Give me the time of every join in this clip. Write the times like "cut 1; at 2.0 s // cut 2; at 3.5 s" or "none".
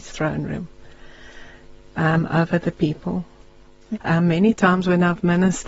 cut 1; at 3.9 s

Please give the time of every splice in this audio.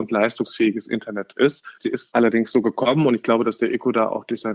cut 1; at 1.8 s

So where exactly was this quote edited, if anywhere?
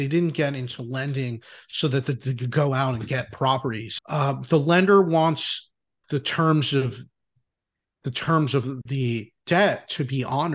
cut 1; at 4.0 s // cut 2; at 6.0 s

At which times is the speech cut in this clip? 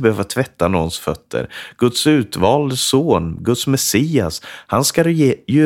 none

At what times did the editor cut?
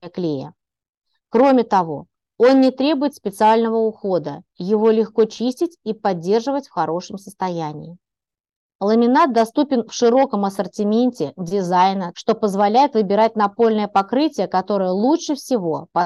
cut 1; at 12.1 s

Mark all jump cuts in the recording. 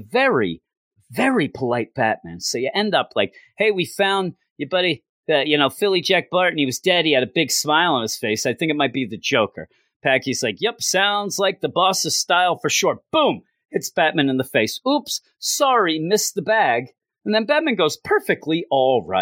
none

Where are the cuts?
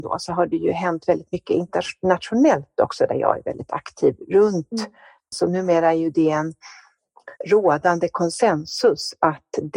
cut 1; at 5.3 s // cut 2; at 7.4 s

